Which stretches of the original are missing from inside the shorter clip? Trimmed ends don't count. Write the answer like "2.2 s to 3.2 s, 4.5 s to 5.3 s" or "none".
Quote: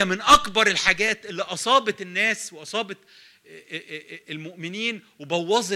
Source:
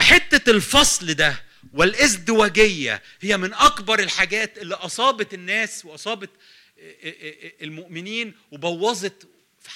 none